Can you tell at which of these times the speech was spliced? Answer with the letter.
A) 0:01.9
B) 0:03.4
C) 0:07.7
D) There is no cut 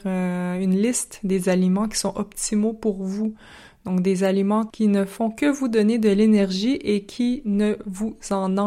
D